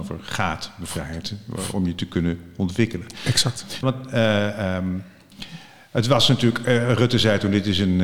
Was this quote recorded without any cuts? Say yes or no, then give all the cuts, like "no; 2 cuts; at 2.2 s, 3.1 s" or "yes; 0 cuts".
no; 1 cut; at 3.8 s